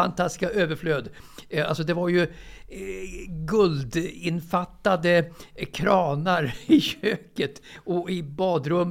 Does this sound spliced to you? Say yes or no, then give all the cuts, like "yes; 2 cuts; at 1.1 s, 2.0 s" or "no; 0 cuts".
no; 0 cuts